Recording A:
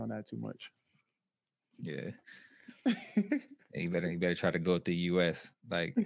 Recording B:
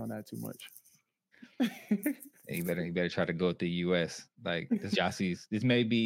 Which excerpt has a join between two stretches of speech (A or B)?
B